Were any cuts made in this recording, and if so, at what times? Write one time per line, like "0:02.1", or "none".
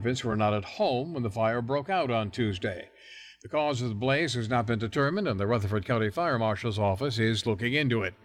none